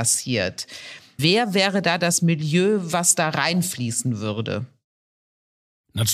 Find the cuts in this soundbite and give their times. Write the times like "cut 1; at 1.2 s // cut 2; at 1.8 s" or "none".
cut 1; at 1.2 s